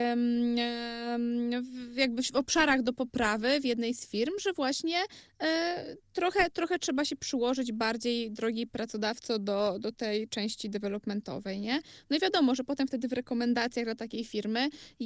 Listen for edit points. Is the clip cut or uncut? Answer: uncut